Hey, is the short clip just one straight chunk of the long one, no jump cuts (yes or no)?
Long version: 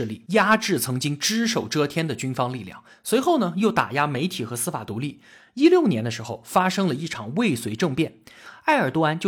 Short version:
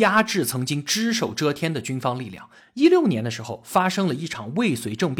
no